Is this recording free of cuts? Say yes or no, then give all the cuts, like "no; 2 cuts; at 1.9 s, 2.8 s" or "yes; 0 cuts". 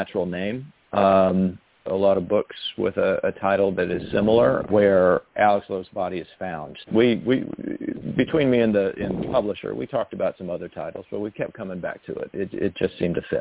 no; 3 cuts; at 1.9 s, 4.7 s, 6.8 s